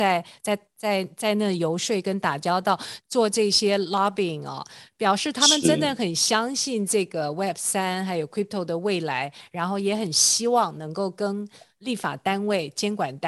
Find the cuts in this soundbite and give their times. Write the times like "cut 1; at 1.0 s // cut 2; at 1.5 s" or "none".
cut 1; at 3.0 s